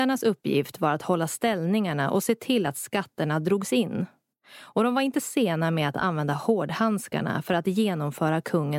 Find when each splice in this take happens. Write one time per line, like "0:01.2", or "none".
none